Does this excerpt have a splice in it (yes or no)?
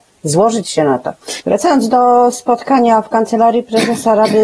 yes